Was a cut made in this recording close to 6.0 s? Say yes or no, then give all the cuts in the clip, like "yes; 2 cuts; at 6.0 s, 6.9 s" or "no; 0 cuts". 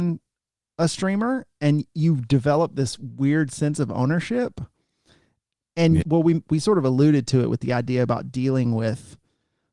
yes; 1 cut; at 6.0 s